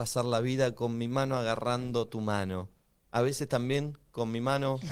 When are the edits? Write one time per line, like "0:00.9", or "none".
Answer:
none